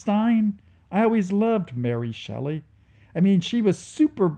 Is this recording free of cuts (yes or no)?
yes